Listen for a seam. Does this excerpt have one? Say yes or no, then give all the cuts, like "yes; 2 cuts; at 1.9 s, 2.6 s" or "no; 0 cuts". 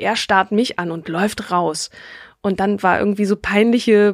no; 0 cuts